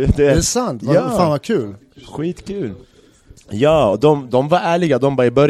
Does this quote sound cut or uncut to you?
uncut